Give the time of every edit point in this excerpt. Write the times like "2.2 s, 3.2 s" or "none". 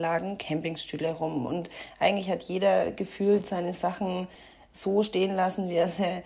none